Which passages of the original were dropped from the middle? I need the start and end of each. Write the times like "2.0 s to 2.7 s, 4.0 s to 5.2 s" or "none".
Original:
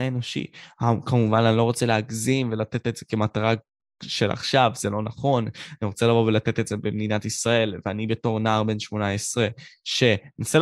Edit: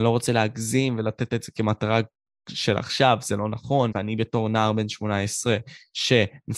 5.4 s to 7.8 s